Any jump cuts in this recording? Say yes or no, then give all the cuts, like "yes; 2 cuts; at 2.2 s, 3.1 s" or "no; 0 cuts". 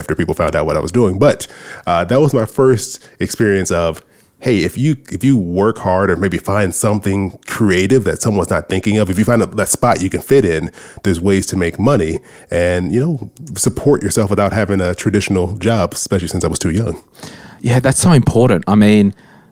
no; 0 cuts